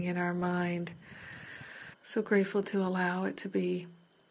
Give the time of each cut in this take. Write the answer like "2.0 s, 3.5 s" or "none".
1.9 s